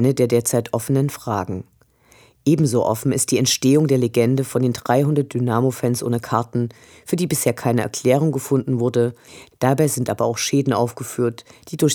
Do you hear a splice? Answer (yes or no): yes